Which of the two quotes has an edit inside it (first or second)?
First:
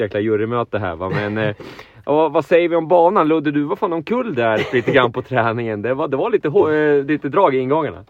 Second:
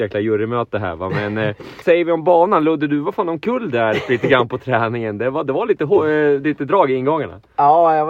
second